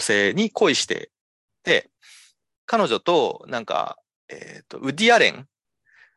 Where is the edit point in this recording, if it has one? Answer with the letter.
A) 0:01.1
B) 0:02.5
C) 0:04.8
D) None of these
D